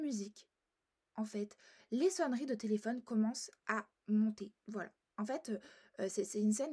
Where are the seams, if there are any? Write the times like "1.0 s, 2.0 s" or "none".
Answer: 4.6 s